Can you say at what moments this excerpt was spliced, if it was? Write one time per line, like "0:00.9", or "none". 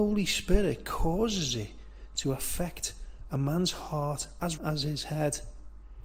0:04.6